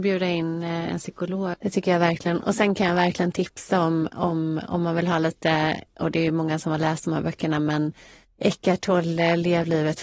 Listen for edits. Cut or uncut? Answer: cut